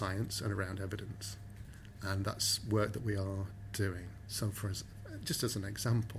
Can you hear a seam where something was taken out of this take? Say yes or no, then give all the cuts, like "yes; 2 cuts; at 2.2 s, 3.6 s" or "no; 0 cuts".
no; 0 cuts